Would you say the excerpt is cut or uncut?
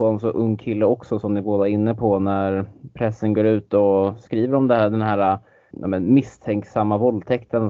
cut